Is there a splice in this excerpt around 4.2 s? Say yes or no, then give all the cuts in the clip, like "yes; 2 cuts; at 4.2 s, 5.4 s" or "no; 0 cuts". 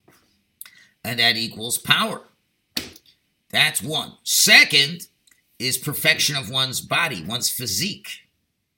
no; 0 cuts